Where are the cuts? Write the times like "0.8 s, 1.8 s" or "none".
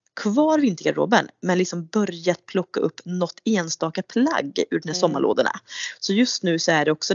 none